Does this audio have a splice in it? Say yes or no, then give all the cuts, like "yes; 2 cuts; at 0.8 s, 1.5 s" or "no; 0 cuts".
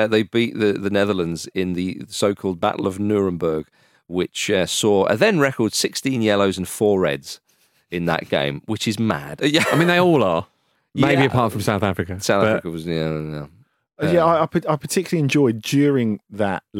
yes; 1 cut; at 9.4 s